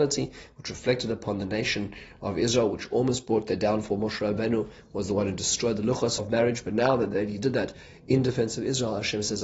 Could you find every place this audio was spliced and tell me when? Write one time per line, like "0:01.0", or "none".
0:06.2